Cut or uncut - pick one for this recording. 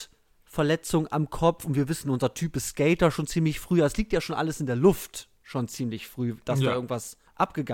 uncut